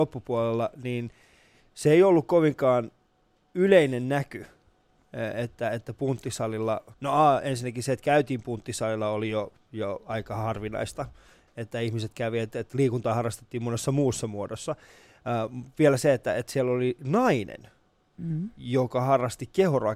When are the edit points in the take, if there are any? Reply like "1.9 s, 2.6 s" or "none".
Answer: 6.9 s